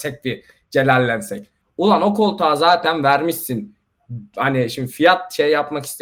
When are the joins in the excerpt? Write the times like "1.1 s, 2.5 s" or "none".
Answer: 1.6 s